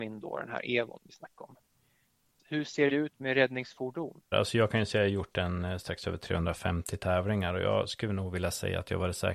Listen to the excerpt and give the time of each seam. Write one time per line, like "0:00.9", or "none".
0:02.4
0:04.3